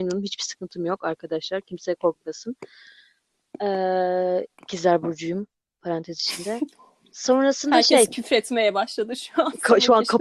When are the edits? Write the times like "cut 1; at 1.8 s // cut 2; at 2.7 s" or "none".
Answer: none